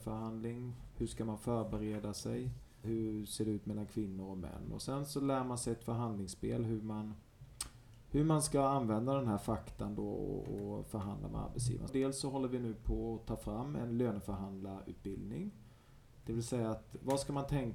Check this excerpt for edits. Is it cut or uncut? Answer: cut